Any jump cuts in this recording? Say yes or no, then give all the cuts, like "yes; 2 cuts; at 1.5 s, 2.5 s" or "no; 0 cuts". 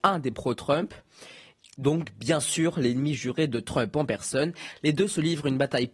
no; 0 cuts